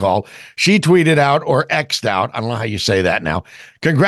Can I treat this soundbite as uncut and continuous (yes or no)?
yes